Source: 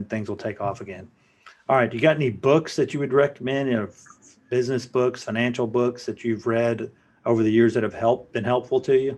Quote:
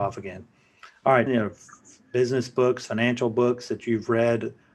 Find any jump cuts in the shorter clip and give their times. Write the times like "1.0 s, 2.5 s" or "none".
1.3 s